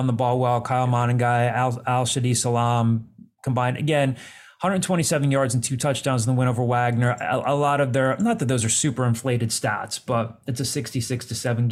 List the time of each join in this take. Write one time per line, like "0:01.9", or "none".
none